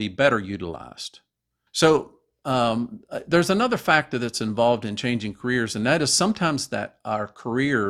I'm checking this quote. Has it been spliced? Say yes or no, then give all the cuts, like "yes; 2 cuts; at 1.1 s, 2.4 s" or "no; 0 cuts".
yes; 1 cut; at 1.7 s